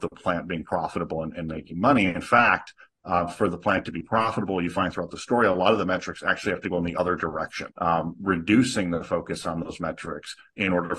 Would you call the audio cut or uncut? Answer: cut